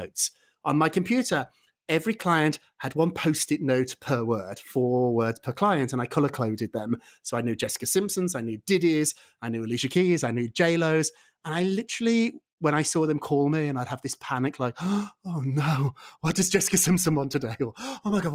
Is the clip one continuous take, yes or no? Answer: yes